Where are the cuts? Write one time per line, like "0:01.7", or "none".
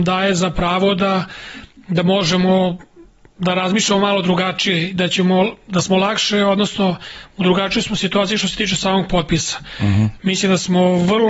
none